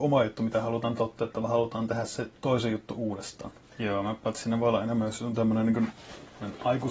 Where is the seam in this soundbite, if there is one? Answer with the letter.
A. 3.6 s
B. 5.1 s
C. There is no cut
A